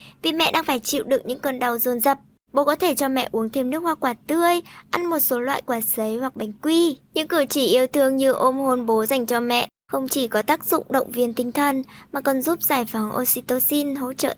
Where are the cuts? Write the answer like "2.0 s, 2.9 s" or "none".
2.5 s, 7.0 s